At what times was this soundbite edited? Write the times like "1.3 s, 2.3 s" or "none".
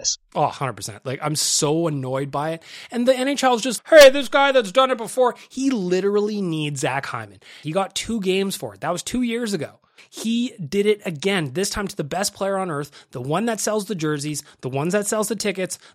3.8 s, 7.6 s, 10.0 s